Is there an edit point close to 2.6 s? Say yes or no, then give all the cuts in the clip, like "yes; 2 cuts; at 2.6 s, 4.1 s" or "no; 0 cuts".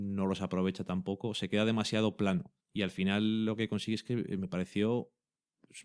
yes; 1 cut; at 2.6 s